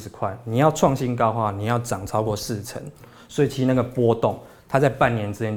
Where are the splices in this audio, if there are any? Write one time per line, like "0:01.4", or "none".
none